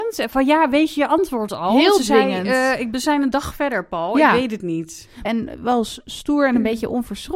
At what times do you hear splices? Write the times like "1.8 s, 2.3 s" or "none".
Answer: 5.2 s

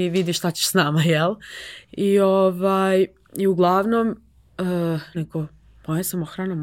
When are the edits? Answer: 1.9 s, 5.1 s

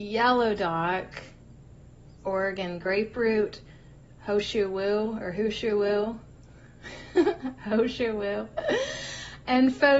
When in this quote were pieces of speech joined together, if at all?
2.2 s

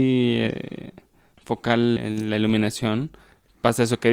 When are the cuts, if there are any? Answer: 2.0 s

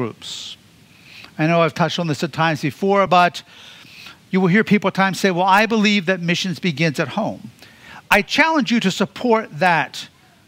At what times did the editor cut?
none

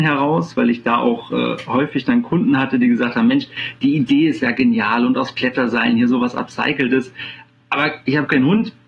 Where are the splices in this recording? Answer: none

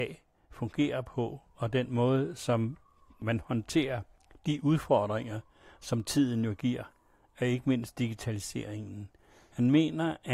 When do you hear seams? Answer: none

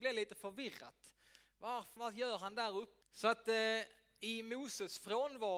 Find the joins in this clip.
2.0 s, 3.0 s

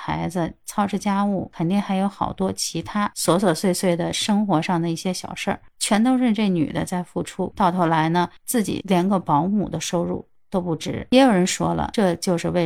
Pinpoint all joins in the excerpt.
none

